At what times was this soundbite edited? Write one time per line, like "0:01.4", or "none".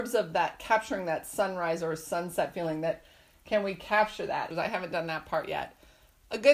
0:04.5